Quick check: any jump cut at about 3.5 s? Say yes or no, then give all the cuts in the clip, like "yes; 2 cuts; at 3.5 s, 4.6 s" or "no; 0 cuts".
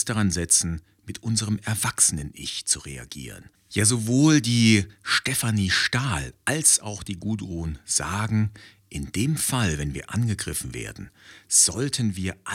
yes; 1 cut; at 3.5 s